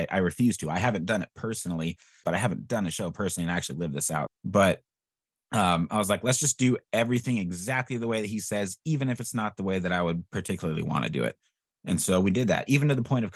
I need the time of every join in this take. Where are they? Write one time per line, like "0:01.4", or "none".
0:02.2
0:04.3